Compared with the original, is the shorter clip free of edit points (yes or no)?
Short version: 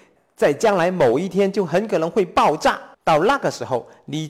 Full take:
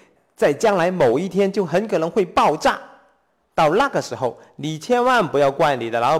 no